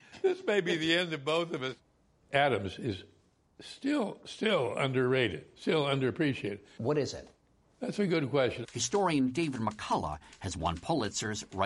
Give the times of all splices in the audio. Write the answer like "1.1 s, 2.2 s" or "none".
6.8 s, 8.6 s